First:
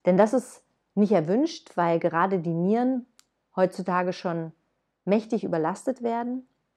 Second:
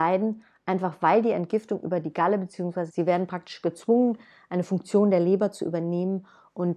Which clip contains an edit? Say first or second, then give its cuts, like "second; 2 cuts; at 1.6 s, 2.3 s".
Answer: second; 1 cut; at 2.9 s